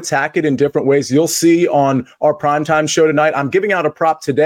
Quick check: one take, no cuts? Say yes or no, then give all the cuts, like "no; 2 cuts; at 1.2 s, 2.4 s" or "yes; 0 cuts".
yes; 0 cuts